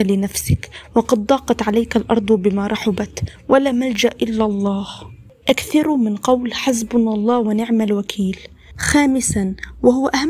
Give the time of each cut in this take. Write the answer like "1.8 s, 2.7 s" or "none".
8.8 s